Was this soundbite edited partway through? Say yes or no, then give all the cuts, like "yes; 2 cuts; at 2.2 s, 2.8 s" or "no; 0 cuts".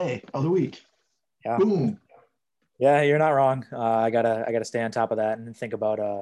no; 0 cuts